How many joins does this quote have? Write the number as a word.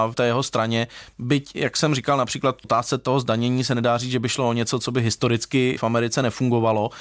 zero